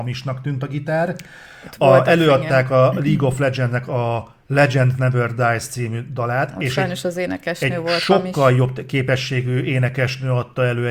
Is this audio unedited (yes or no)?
yes